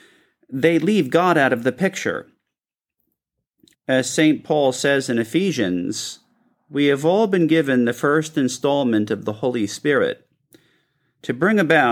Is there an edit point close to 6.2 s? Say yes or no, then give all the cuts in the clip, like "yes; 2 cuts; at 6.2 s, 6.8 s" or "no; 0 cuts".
no; 1 cut; at 3.7 s